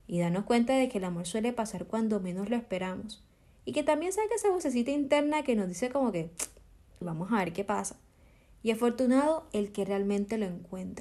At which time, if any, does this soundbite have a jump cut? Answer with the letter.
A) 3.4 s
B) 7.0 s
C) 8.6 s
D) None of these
B